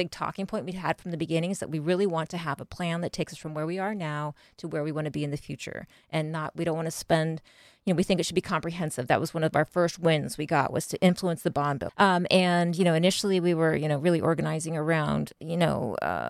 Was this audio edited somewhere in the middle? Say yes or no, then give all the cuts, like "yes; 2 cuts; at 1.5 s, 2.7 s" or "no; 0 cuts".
yes; 2 cuts; at 11.9 s, 15.4 s